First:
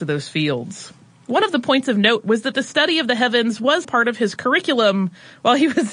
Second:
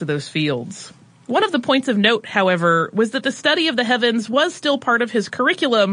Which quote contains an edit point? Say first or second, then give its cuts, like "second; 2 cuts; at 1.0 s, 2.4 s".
first; 2 cuts; at 2.2 s, 3.8 s